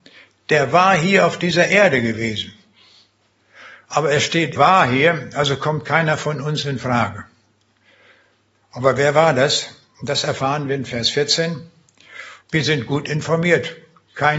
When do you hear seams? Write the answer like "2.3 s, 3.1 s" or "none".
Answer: 4.6 s, 12.4 s